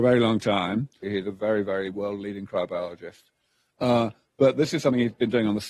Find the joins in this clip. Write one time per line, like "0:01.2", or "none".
0:01.0